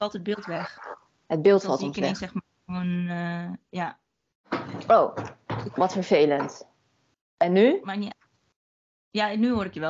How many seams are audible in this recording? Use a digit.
0